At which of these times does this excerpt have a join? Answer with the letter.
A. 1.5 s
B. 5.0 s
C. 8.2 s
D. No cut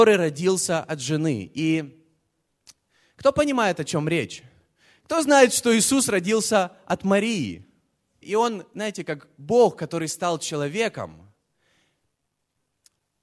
C